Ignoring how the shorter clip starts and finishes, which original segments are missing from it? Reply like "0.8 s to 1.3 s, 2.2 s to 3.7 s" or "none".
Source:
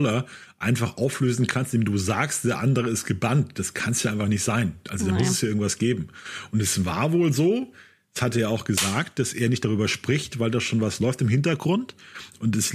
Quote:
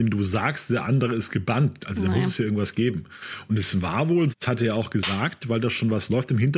3.5 s to 4.8 s, 7.3 s to 8.0 s, 9.1 s to 10.3 s